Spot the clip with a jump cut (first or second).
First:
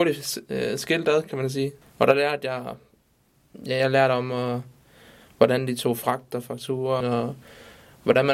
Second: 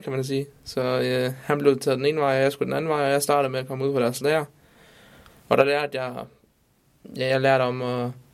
first